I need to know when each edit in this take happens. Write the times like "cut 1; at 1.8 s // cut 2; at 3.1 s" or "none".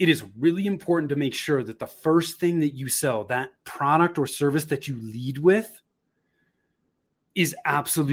cut 1; at 7.2 s